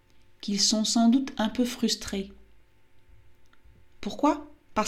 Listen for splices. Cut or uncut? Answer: uncut